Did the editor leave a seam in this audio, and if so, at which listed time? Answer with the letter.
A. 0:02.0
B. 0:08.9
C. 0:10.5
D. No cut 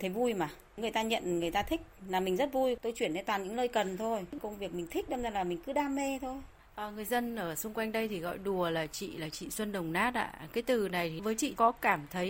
D